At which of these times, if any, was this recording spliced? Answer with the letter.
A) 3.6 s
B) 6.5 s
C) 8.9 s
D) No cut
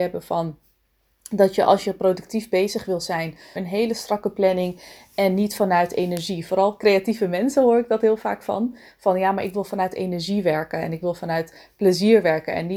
A